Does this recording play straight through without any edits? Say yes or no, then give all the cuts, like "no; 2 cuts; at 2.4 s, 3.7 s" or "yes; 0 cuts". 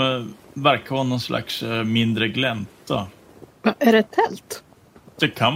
no; 1 cut; at 3.5 s